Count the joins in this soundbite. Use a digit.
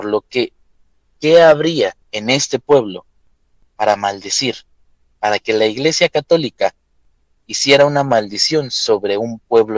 1